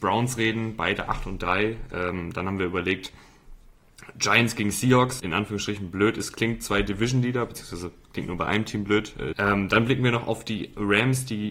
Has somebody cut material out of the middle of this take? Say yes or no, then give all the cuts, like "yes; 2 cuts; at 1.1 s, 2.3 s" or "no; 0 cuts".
yes; 2 cuts; at 5.2 s, 9.3 s